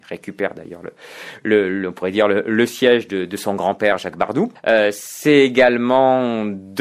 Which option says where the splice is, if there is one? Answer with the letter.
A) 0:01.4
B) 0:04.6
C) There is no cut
B